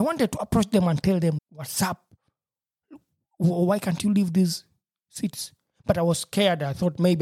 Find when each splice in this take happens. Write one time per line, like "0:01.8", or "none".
0:01.4